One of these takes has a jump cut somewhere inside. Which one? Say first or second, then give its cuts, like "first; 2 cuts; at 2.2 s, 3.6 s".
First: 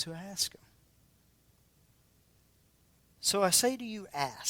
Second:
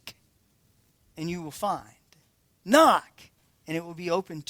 first; 1 cut; at 3.1 s